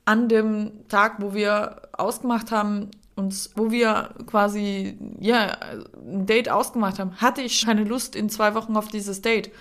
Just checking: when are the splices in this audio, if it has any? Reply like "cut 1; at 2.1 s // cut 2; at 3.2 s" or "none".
cut 1; at 3.5 s // cut 2; at 7.6 s